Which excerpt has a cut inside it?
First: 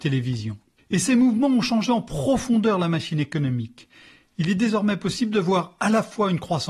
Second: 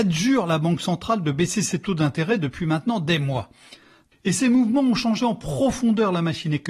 second; 1 cut; at 4.1 s

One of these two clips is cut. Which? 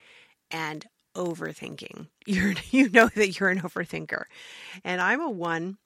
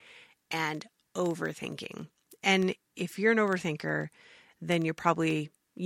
first; 1 cut; at 2.2 s

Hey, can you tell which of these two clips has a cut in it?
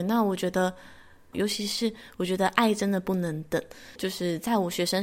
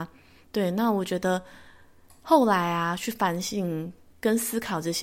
first; 2 cuts; at 1.3 s, 4.0 s

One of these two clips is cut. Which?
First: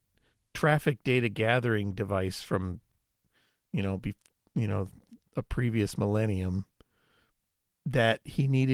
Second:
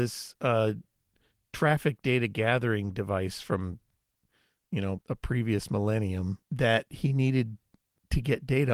second; 2 cuts; at 5.0 s, 6.4 s

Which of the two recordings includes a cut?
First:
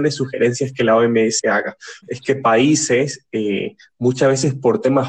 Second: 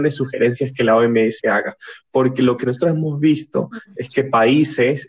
first; 1 cut; at 2.0 s

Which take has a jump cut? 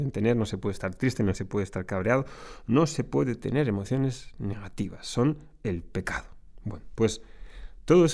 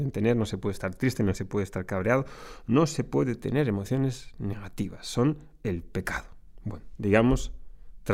second; 1 cut; at 7.0 s

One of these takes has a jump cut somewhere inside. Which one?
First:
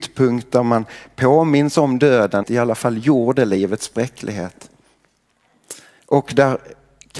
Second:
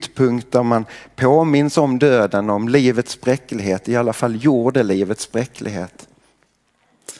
first; 2 cuts; at 2.4 s, 6.0 s

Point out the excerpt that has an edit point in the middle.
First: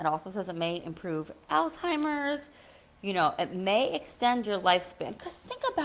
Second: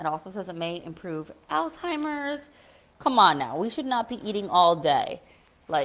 second; 1 cut; at 2.9 s

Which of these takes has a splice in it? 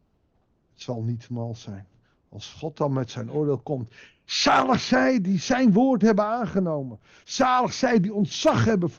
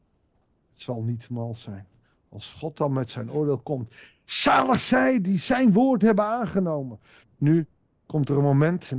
second; 1 cut; at 7.2 s

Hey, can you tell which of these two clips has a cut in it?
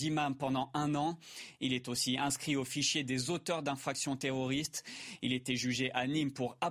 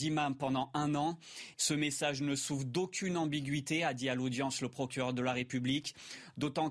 second; 1 cut; at 1.5 s

